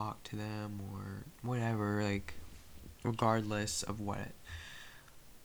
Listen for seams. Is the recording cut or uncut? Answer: uncut